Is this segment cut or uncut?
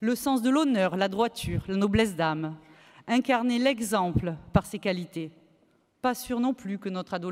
uncut